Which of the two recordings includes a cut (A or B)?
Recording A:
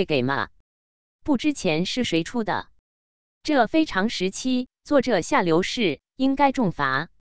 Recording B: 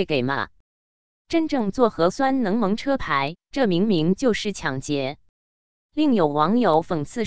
B